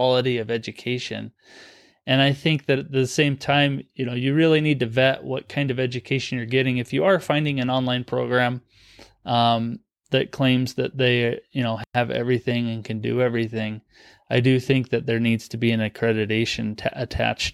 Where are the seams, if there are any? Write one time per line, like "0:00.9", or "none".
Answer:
none